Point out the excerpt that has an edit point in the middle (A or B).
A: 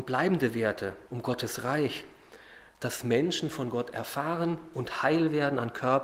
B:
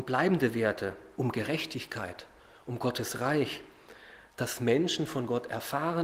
A